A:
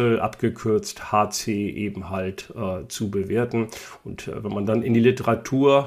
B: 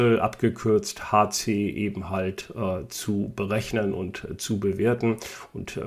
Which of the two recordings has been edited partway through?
A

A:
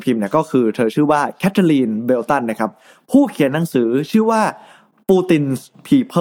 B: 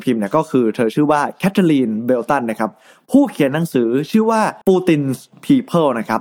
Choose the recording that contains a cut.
B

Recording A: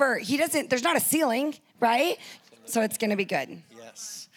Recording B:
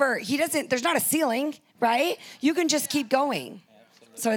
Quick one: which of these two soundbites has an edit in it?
A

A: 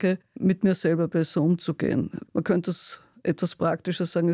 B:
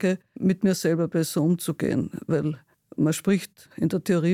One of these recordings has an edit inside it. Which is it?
A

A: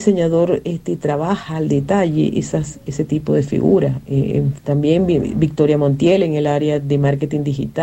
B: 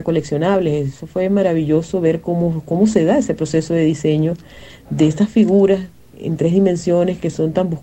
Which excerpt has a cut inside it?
A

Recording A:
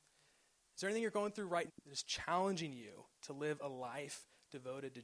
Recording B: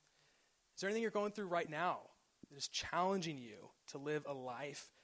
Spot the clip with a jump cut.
A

